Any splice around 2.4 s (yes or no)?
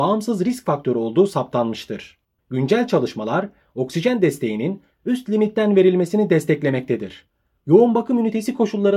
yes